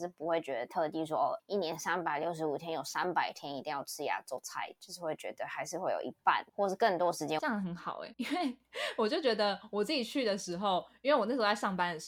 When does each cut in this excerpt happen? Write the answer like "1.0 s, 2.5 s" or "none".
7.4 s